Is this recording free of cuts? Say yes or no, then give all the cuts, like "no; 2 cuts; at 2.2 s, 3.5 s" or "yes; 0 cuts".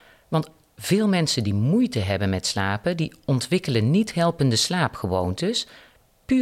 yes; 0 cuts